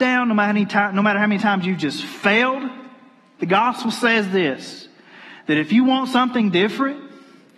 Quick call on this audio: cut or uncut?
cut